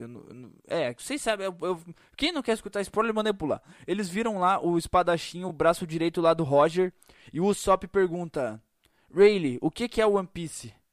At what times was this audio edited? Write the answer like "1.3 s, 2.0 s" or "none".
none